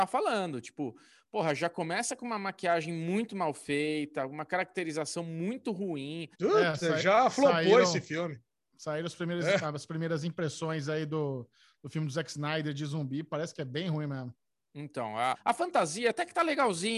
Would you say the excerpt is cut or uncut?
cut